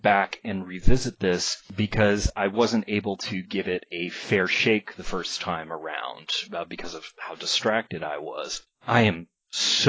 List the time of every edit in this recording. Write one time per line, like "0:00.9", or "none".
none